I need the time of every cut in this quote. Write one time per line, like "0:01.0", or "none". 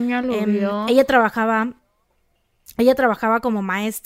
none